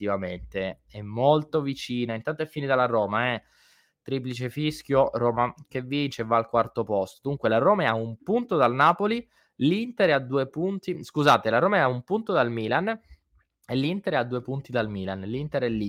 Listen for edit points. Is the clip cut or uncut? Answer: uncut